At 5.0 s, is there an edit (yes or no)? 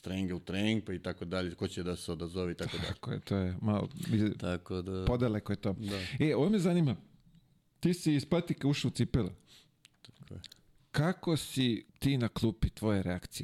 no